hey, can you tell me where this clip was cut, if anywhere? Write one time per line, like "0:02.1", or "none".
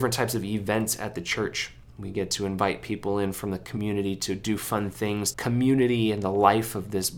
0:05.3